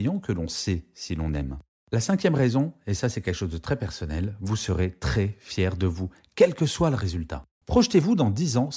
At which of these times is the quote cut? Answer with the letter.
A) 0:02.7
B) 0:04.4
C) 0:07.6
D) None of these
C